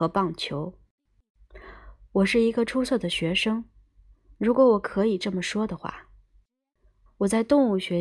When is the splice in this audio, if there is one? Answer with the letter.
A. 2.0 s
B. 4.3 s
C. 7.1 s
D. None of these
C